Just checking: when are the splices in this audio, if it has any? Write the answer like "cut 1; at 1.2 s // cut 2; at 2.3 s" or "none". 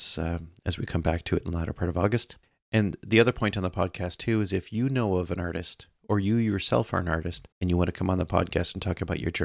cut 1; at 7.5 s